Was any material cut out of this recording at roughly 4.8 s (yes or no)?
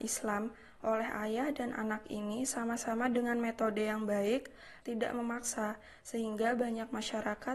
yes